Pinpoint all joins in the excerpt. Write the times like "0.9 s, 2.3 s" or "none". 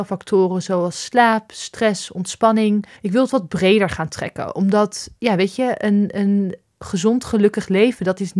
3.0 s